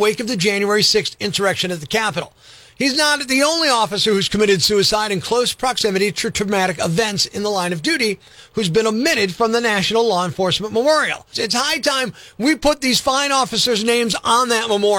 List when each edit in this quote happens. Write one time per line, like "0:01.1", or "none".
0:11.3